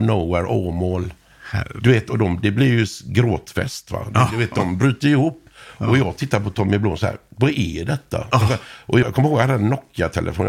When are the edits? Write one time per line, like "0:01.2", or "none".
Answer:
0:09.0

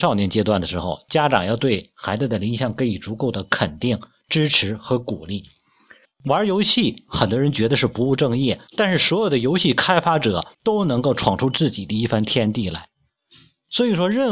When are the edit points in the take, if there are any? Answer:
0:06.0
0:08.7
0:10.5

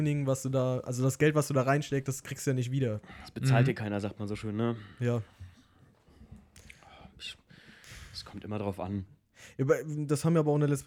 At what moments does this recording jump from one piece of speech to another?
none

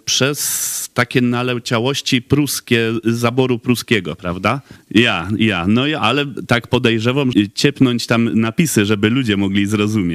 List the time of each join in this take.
0:04.8
0:07.3

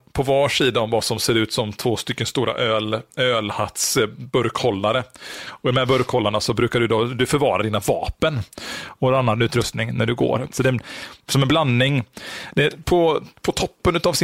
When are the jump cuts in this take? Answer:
0:10.5

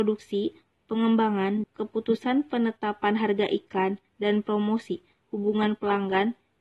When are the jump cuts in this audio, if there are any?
0:01.6
0:05.2

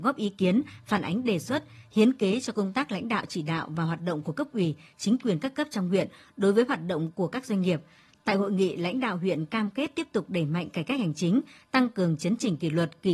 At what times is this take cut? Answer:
none

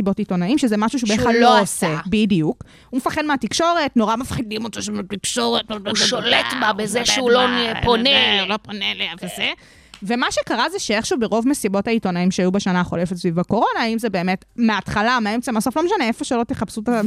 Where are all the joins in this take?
none

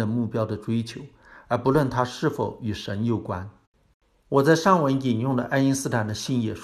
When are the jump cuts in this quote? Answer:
0:04.1

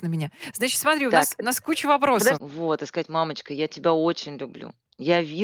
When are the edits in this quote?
0:02.3

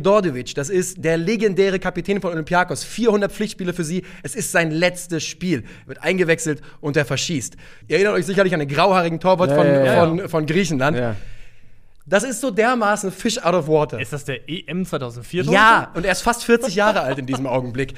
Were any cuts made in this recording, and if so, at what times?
0:07.8

